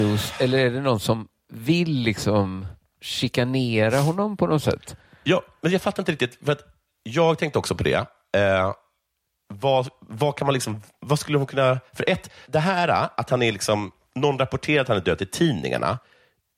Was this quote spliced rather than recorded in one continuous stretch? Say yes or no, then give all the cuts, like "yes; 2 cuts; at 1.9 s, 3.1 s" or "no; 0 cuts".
yes; 1 cut; at 12.5 s